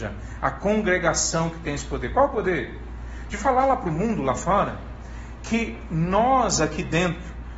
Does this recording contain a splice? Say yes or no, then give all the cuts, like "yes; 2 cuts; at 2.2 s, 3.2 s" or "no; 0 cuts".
no; 0 cuts